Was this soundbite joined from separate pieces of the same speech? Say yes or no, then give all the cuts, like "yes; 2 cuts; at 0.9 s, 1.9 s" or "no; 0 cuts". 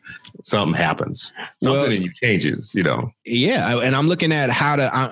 no; 0 cuts